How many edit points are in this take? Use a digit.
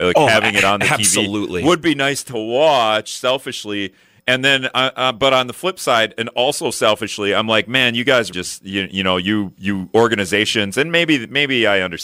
1